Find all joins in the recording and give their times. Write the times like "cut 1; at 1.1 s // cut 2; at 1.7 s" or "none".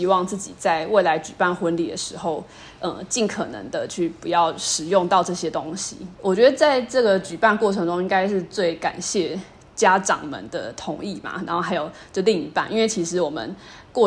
none